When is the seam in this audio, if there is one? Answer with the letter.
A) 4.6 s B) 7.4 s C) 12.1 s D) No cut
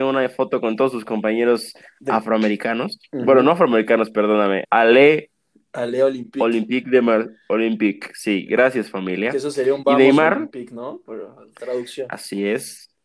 A